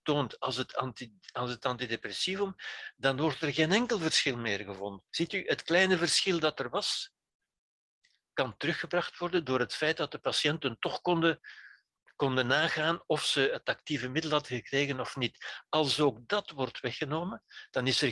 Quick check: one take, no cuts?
no; 1 cut; at 5.1 s

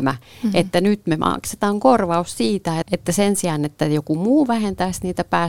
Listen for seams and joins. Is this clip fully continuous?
no; 1 cut; at 2.8 s

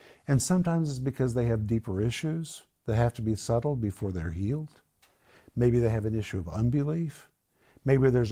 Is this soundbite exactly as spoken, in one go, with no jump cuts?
yes; 0 cuts

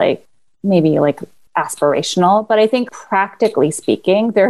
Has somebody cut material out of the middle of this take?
yes; 1 cut; at 2.9 s

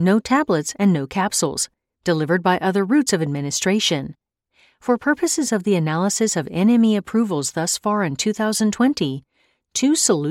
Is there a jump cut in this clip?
no; 0 cuts

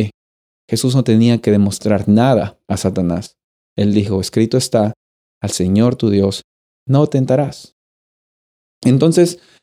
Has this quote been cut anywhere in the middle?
no; 0 cuts

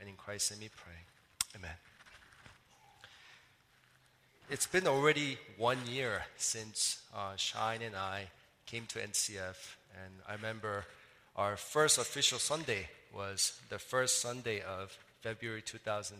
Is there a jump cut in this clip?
no; 0 cuts

